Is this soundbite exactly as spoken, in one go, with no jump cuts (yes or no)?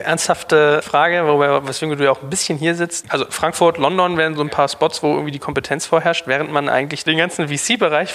no